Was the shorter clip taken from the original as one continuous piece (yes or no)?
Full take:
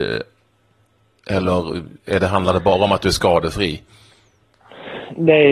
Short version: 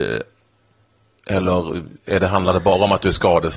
yes